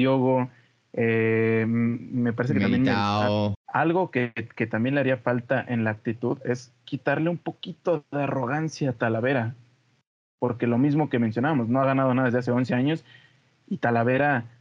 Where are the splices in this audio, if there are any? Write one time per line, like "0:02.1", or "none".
0:03.5